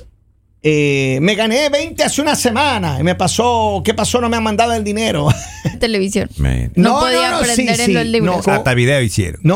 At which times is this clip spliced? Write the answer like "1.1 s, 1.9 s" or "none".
5.7 s, 8.4 s